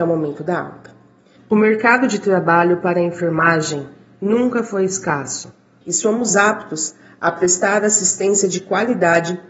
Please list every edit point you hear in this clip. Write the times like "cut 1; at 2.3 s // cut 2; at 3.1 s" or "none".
cut 1; at 1.4 s // cut 2; at 5.8 s